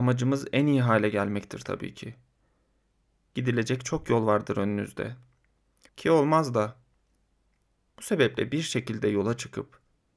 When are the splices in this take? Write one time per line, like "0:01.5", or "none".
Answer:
0:05.9